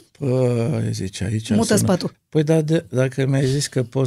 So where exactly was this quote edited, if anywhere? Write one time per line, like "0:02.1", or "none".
0:02.1